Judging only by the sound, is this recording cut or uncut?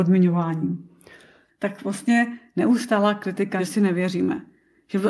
cut